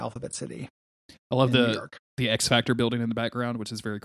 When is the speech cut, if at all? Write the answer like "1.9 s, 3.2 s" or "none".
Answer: none